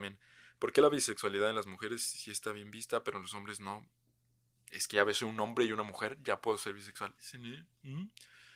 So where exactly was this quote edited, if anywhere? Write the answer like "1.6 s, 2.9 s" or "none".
4.6 s, 7.2 s